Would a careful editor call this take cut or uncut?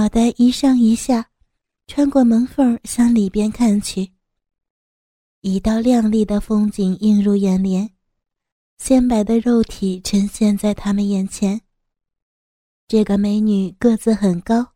uncut